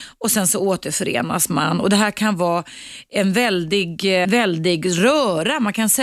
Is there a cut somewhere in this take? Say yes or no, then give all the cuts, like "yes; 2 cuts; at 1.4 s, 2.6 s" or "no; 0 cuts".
yes; 1 cut; at 4.2 s